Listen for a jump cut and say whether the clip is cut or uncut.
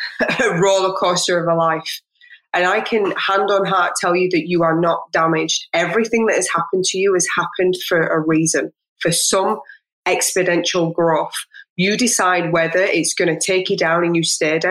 uncut